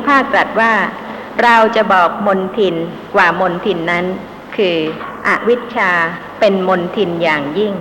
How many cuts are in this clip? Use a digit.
0